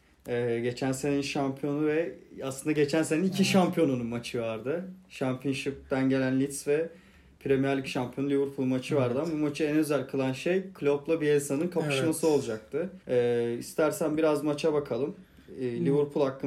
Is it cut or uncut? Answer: cut